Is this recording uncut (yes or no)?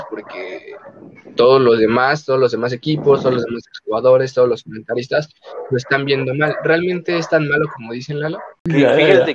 yes